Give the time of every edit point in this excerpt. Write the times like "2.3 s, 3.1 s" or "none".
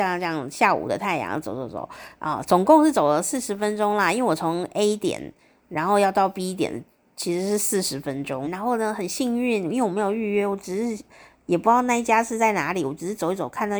8.4 s